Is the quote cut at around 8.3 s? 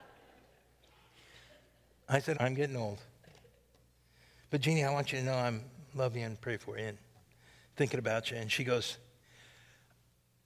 no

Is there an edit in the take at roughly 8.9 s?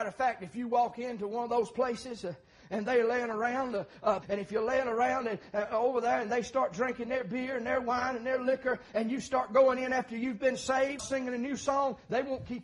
no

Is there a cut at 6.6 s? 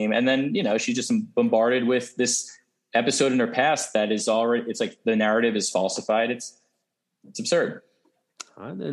no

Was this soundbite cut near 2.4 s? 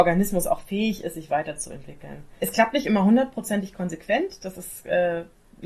yes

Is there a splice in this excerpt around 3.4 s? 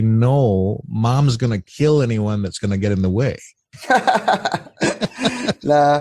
no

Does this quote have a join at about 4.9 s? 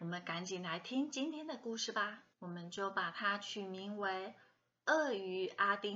no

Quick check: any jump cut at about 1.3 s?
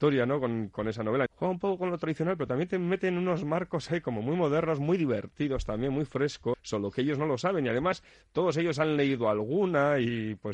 yes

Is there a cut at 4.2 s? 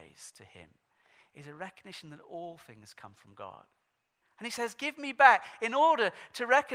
yes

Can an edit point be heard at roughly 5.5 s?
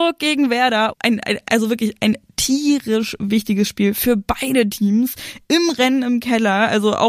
no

